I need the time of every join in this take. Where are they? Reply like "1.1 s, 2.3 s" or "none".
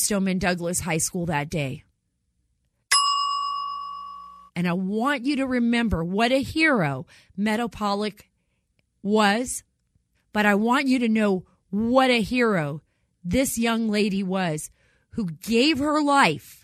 4.5 s, 10.1 s